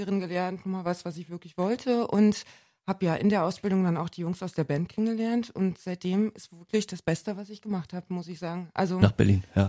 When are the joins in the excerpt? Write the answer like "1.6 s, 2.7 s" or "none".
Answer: none